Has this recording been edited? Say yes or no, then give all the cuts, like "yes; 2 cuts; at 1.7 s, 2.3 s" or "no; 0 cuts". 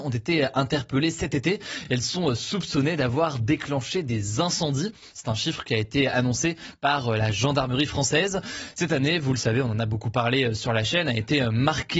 no; 0 cuts